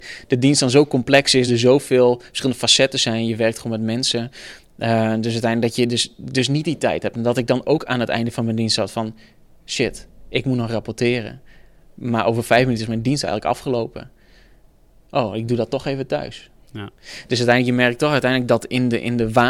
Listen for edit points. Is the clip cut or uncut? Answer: uncut